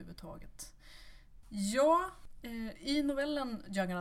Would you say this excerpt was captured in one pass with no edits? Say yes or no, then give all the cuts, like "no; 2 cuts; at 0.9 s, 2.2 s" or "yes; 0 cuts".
no; 1 cut; at 1.4 s